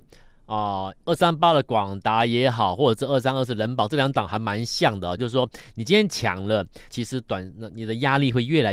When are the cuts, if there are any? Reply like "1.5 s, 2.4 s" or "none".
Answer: 5.2 s, 6.9 s